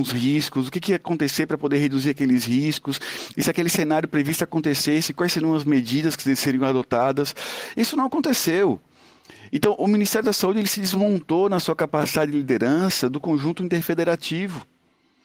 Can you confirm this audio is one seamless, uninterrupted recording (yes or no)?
yes